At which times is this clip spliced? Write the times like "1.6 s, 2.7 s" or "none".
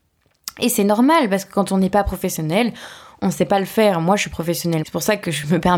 4.8 s